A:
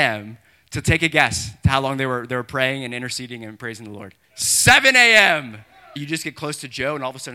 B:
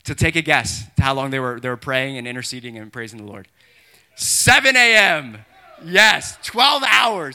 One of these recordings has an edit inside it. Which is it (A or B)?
A